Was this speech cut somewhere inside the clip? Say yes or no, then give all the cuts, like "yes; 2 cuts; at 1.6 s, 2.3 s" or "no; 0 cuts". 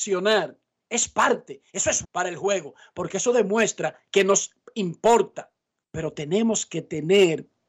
yes; 2 cuts; at 2.0 s, 5.8 s